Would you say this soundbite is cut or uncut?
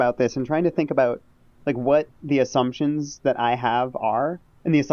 uncut